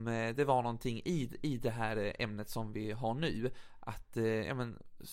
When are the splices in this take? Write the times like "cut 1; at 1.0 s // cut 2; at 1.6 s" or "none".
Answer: none

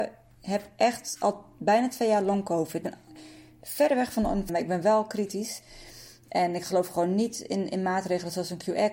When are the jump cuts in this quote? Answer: cut 1; at 2.8 s // cut 2; at 4.5 s

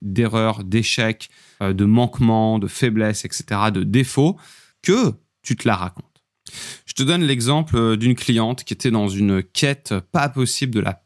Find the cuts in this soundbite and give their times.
none

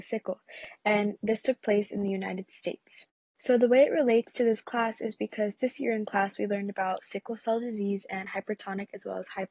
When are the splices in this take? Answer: cut 1; at 3.4 s

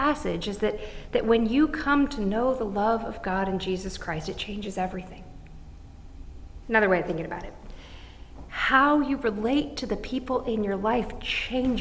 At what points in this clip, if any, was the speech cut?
cut 1; at 6.6 s // cut 2; at 8.5 s

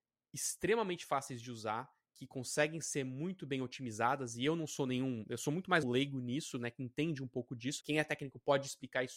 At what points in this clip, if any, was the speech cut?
cut 1; at 5.8 s // cut 2; at 7.8 s

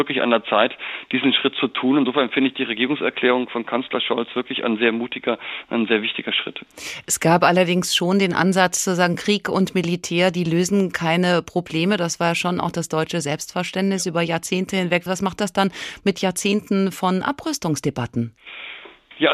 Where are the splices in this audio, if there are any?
none

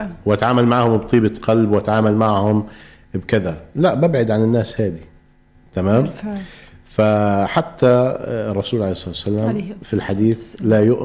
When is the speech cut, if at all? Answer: none

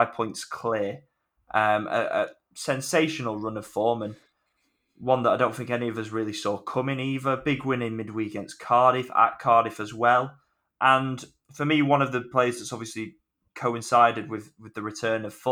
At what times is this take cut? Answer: none

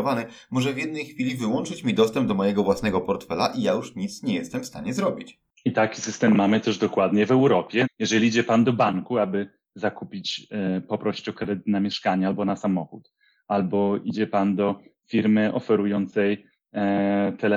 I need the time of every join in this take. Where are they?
cut 1; at 7.8 s

